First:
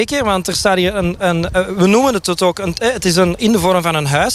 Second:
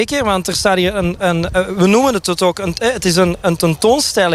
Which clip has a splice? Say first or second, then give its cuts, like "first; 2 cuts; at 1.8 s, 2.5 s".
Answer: first; 1 cut; at 3.4 s